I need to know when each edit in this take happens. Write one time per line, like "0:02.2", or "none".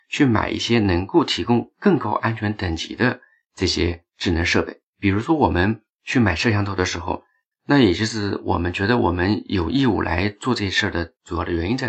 0:04.9
0:07.5